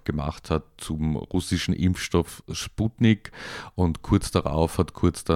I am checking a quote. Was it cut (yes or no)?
no